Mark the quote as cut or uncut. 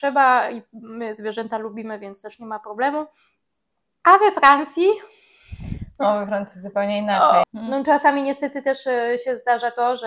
cut